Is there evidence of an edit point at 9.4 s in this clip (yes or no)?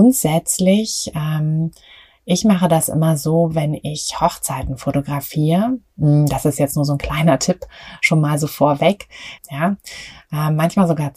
yes